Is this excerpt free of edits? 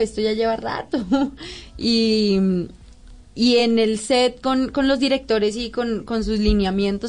yes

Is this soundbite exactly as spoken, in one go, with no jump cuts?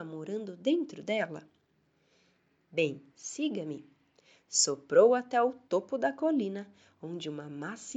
no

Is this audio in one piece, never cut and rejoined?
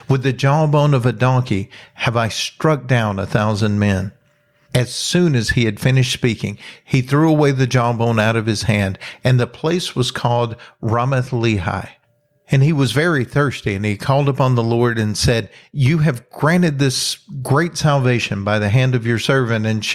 yes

